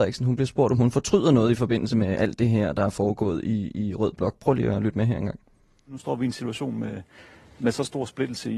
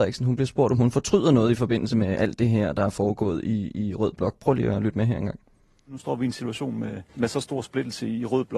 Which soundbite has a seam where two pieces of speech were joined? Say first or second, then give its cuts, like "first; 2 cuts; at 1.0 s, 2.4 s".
second; 1 cut; at 7.1 s